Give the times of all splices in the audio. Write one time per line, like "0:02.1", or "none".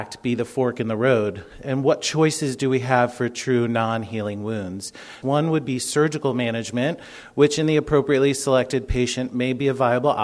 0:05.2